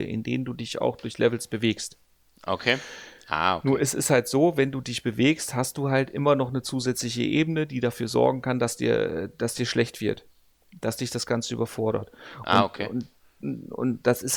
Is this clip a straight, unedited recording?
yes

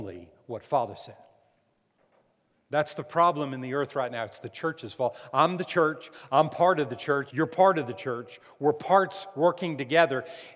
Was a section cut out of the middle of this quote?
yes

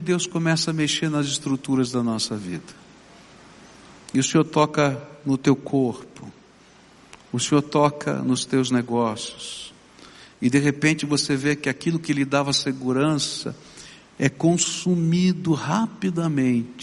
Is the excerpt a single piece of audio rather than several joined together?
yes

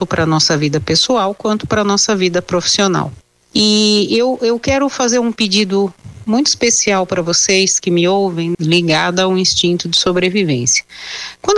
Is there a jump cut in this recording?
yes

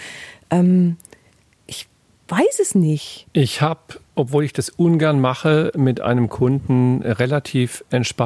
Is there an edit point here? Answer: yes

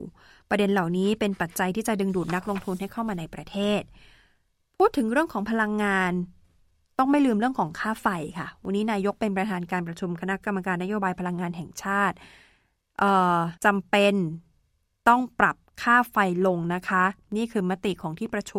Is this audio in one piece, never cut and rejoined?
no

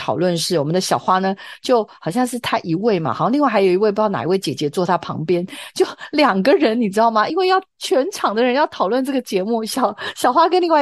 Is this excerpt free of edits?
yes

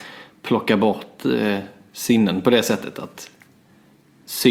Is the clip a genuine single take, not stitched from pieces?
yes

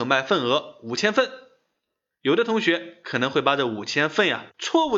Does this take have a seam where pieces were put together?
no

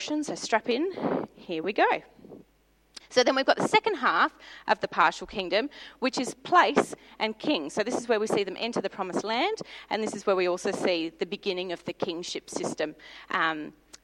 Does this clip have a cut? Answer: yes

